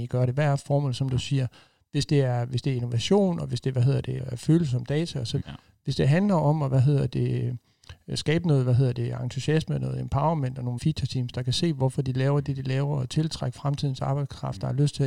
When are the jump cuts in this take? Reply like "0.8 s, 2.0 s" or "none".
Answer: 4.2 s, 5.4 s, 10.8 s